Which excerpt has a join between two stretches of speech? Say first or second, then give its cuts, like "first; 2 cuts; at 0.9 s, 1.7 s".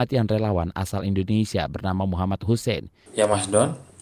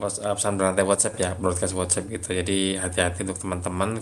first; 1 cut; at 3.1 s